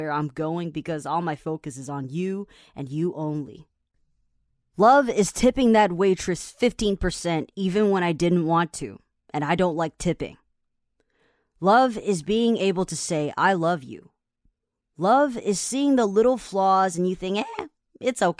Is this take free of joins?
yes; 0 cuts

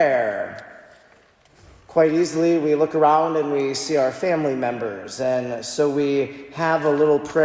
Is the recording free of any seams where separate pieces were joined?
yes; 0 cuts

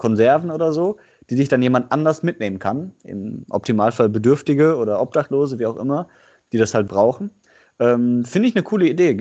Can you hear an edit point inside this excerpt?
yes; 1 cut; at 6.9 s

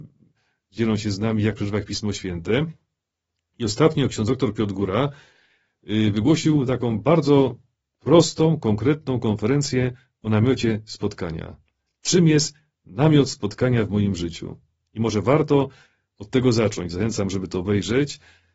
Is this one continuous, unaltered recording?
yes; 0 cuts

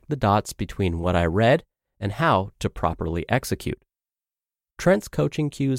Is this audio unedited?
no; 1 cut; at 4.7 s

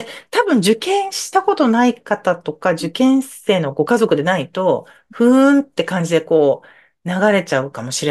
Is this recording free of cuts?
yes; 0 cuts

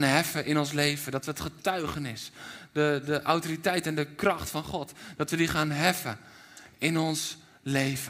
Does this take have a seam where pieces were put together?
no; 0 cuts

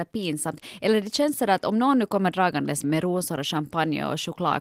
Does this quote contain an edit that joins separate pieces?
yes; 1 cut; at 2.8 s

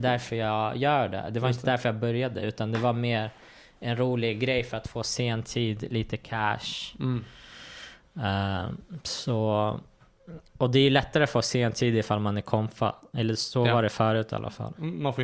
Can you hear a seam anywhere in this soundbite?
no; 0 cuts

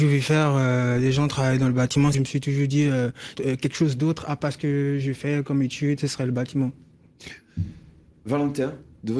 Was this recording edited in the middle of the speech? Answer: yes; 2 cuts; at 2.1 s, 3.3 s

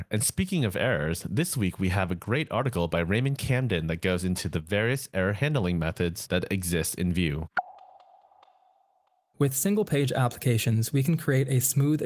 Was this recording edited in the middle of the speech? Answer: no; 0 cuts

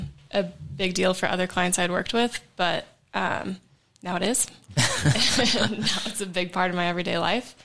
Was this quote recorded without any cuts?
yes; 0 cuts

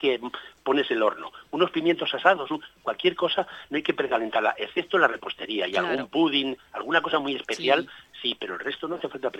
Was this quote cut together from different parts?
no; 0 cuts

